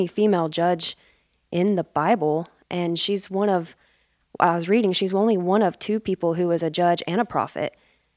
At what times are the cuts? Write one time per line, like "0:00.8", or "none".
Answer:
none